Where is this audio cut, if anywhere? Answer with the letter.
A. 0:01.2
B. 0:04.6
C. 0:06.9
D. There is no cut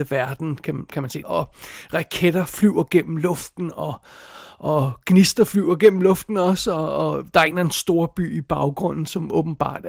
A